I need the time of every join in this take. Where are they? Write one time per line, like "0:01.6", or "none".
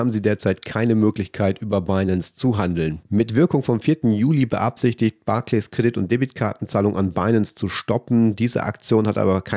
none